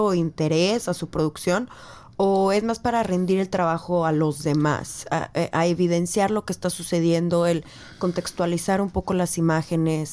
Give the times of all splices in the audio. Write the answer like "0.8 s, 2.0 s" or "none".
none